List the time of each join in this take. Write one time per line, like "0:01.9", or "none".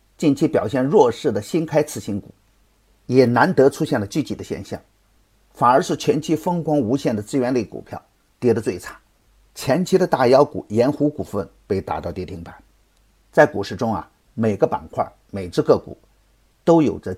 none